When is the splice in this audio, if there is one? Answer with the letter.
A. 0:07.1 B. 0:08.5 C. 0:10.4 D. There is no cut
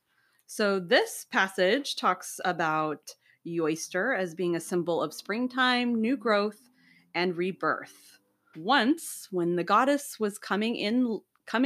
B